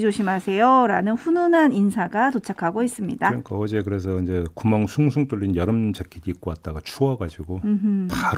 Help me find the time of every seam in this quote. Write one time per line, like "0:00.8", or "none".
none